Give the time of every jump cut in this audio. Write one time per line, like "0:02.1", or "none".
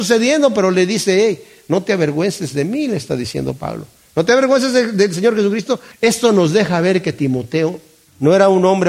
0:05.9